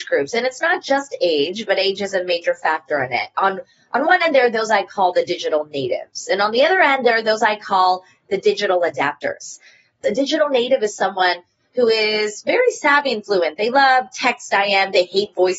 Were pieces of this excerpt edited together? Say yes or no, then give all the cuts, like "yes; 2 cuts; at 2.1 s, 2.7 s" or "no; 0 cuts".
no; 0 cuts